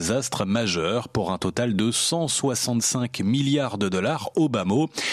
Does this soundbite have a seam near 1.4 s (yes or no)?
no